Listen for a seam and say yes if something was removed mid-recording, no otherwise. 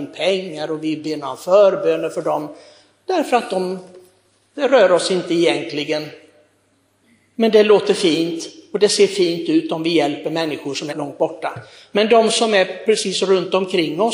yes